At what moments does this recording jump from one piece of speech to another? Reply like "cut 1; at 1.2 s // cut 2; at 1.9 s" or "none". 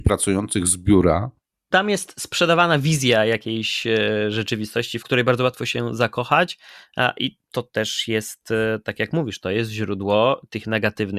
cut 1; at 1.7 s // cut 2; at 5.0 s